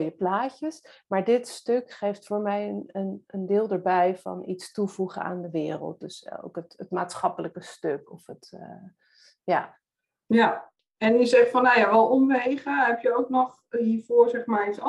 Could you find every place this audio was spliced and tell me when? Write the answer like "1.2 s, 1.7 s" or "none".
none